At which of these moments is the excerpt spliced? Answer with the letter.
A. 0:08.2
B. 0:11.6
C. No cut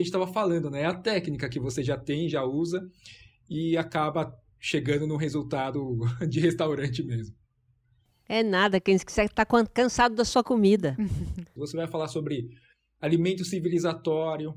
B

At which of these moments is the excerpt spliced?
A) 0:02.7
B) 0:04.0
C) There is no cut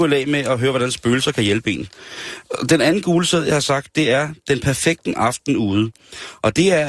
C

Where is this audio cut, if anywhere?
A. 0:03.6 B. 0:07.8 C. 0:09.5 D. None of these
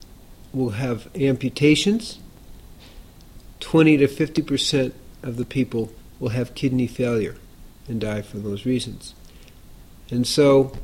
A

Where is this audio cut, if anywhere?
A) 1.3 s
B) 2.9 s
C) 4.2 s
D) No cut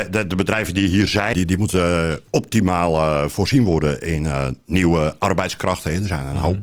A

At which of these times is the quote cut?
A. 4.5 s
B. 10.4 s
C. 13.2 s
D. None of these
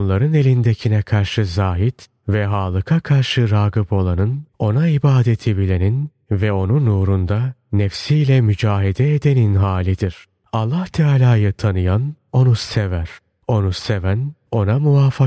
A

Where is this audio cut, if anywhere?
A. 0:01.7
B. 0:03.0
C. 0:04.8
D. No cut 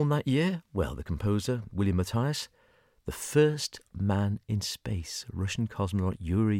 D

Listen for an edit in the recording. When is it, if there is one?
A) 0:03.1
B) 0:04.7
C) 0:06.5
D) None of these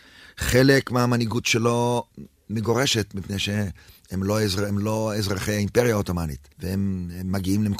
C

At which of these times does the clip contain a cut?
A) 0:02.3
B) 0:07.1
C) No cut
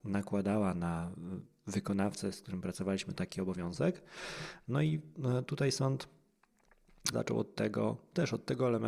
B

